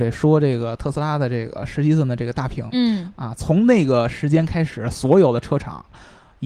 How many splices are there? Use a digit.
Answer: 0